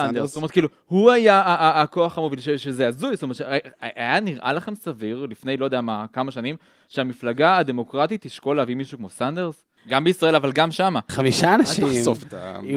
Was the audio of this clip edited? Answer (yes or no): yes